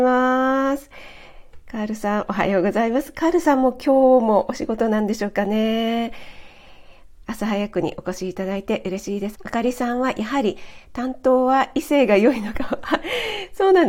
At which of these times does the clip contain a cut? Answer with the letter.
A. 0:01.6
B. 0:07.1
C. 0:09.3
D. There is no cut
C